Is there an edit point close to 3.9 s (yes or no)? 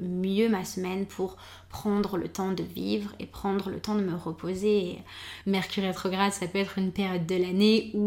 no